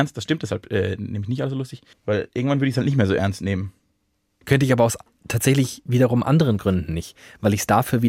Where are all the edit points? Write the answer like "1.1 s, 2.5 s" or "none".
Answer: 1.9 s, 4.4 s